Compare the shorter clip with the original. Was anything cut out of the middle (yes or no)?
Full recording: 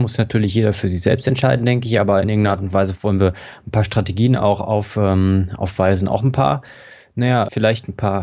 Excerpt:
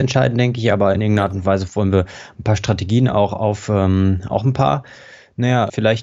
yes